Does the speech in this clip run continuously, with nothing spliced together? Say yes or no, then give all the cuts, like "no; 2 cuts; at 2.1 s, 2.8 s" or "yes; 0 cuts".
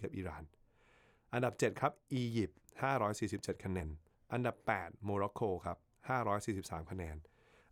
no; 1 cut; at 3.8 s